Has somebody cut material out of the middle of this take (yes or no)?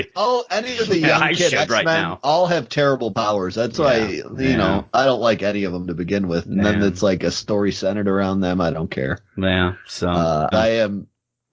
yes